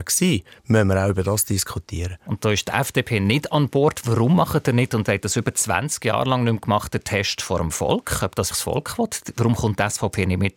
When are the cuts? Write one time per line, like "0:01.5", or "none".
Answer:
0:08.5